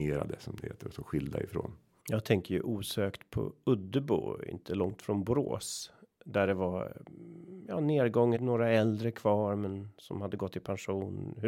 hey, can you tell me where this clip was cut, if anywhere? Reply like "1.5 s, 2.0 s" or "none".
8.4 s